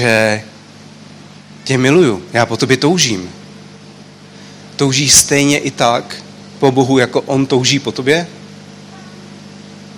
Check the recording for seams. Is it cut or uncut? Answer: uncut